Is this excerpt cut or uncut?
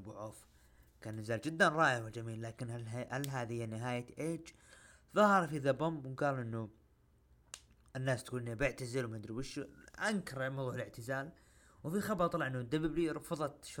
uncut